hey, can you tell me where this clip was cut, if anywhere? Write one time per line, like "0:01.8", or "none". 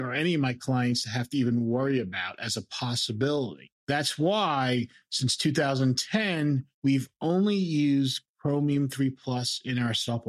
0:03.8